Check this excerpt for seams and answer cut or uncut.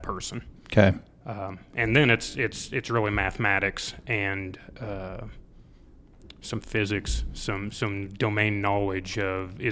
uncut